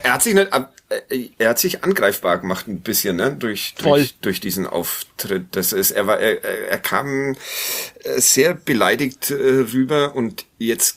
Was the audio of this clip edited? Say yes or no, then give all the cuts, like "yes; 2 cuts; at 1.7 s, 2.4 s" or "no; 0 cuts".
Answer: no; 0 cuts